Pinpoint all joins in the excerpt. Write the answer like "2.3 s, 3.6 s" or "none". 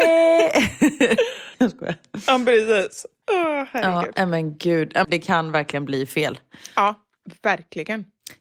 1.5 s, 5.0 s